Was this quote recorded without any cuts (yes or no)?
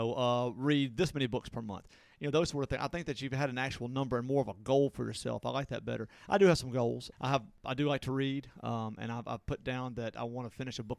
yes